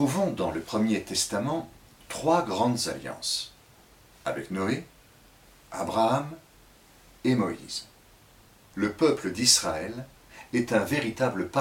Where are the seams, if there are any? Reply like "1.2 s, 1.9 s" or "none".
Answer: 8.7 s